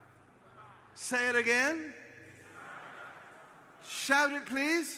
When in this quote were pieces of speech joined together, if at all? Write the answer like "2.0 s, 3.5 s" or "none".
none